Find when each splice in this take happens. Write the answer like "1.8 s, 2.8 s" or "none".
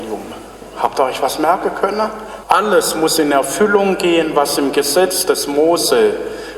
2.4 s